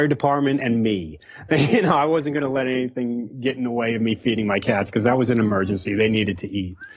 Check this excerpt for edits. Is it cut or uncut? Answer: uncut